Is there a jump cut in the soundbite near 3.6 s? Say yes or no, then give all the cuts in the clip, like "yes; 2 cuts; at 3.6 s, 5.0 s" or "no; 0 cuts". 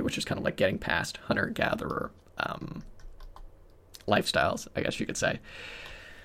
no; 0 cuts